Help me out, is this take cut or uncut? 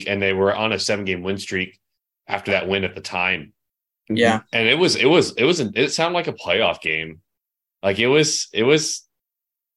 uncut